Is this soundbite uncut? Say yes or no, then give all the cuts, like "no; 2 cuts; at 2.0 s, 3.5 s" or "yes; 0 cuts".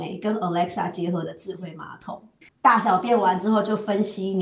no; 1 cut; at 2.4 s